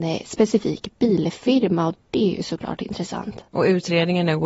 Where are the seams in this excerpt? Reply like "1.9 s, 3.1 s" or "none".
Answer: 3.5 s